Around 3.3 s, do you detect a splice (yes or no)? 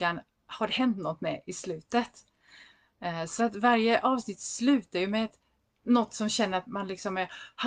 no